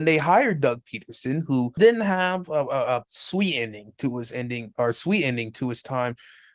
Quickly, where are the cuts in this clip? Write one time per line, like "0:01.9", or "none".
0:01.8
0:03.0